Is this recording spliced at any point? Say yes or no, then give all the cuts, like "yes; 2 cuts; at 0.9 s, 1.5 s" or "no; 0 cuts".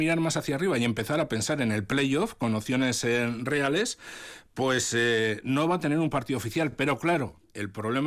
no; 0 cuts